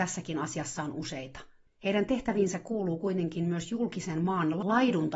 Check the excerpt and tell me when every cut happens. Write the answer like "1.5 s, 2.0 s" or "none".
1.7 s